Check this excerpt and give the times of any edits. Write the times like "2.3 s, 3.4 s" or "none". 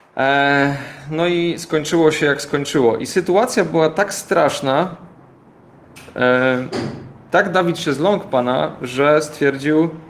none